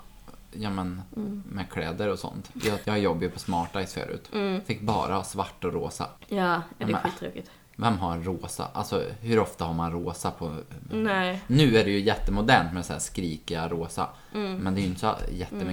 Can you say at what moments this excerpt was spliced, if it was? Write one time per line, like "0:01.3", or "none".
0:02.8